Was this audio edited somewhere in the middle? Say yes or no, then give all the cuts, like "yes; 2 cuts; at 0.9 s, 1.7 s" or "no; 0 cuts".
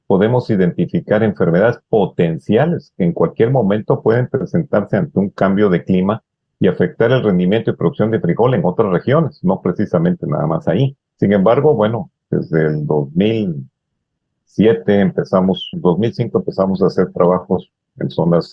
yes; 2 cuts; at 11.1 s, 15.7 s